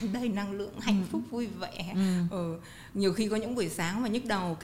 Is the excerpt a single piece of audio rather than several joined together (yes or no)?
yes